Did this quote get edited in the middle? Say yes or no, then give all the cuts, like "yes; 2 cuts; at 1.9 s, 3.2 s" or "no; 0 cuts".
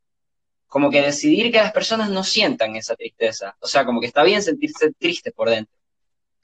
no; 0 cuts